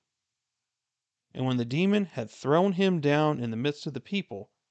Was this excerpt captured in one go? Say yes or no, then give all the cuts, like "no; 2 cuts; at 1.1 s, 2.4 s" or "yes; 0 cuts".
no; 1 cut; at 1.1 s